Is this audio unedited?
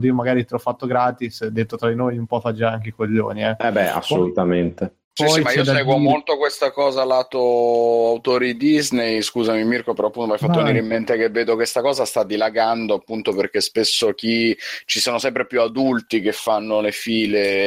yes; 0 cuts

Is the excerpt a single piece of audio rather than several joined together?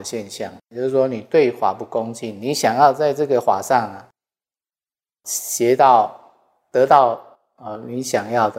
yes; 0 cuts

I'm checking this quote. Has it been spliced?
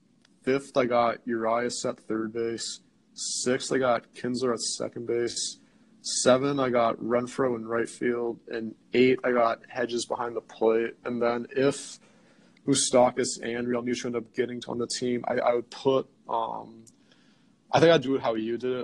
no; 0 cuts

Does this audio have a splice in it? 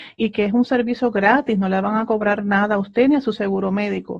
no; 0 cuts

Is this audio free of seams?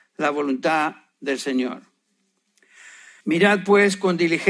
no; 1 cut; at 3.2 s

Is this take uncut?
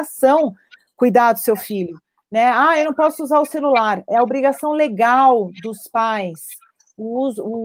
yes; 0 cuts

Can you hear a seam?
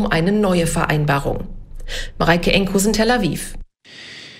no; 0 cuts

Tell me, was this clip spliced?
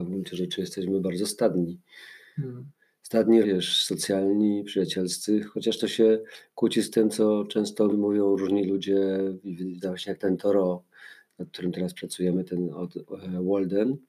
yes; 3 cuts; at 3.4 s, 7.9 s, 9.8 s

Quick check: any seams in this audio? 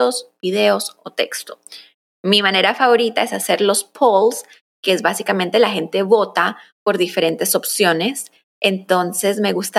no; 0 cuts

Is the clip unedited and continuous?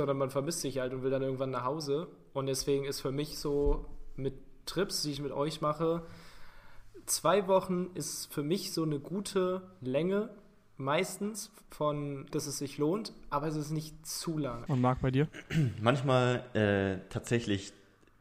no; 2 cuts; at 12.3 s, 14.7 s

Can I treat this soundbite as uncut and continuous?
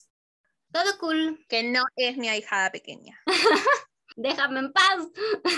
no; 1 cut; at 1.5 s

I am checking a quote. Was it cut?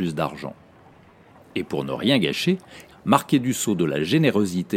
yes; 2 cuts; at 1.3 s, 2.9 s

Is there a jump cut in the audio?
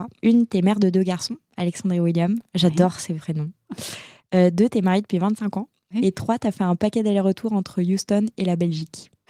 no; 0 cuts

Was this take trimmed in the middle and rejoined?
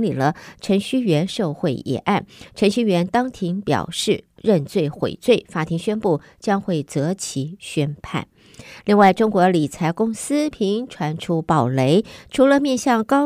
yes; 1 cut; at 10.5 s

